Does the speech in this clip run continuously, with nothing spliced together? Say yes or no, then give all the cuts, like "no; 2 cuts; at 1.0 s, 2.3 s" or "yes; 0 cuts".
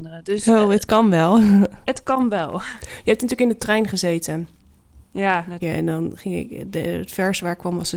no; 1 cut; at 5.6 s